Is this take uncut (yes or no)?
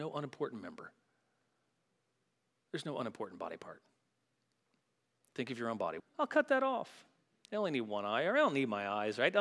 no